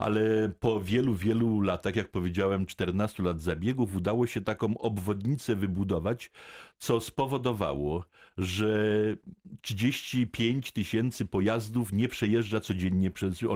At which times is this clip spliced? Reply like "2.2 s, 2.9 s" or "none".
none